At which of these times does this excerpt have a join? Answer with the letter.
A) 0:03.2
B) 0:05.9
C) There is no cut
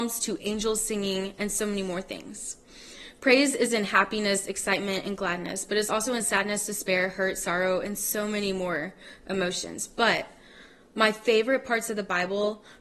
C